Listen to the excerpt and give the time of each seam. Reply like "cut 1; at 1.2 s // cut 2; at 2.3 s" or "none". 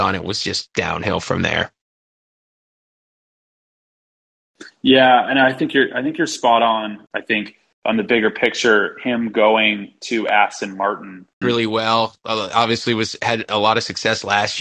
cut 1; at 7.1 s // cut 2; at 11.4 s

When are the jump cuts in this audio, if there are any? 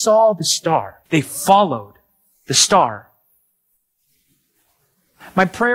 cut 1; at 1.1 s

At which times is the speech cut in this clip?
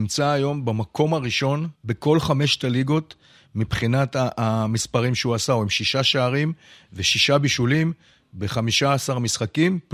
cut 1; at 1.8 s

